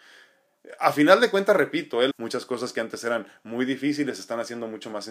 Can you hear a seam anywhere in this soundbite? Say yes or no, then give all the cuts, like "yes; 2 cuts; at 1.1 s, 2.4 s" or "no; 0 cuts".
yes; 1 cut; at 2.1 s